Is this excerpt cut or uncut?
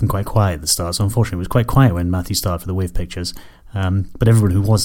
uncut